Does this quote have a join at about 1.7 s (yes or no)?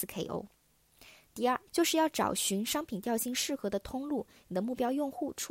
yes